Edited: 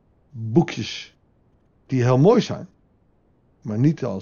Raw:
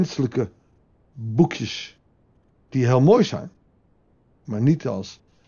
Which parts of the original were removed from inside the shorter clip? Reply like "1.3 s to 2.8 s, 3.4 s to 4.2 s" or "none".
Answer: none